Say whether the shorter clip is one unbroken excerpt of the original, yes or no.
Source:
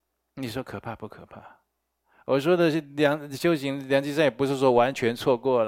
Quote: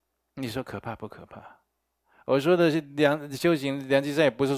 yes